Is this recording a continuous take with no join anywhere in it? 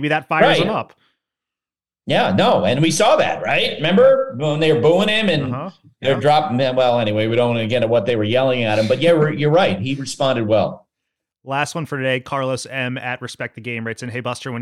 yes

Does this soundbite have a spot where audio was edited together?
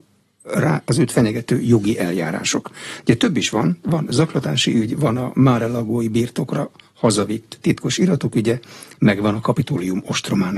no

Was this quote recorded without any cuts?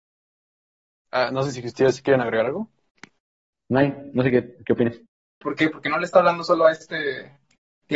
no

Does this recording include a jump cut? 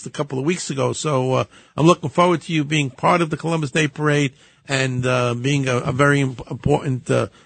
no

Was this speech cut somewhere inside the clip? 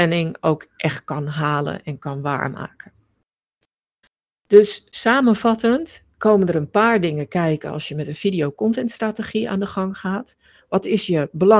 no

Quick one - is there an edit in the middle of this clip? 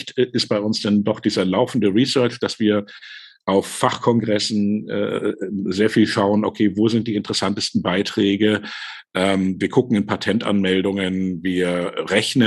no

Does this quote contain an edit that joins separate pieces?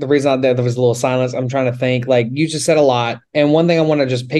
yes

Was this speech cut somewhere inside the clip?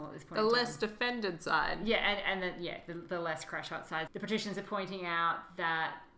yes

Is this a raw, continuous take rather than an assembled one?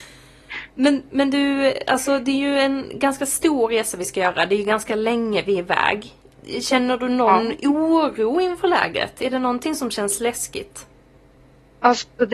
yes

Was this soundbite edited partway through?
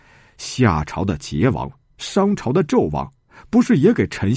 no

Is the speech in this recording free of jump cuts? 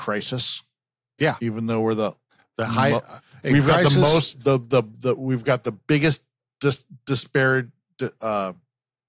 yes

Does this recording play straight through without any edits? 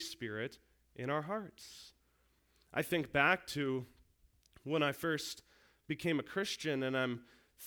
yes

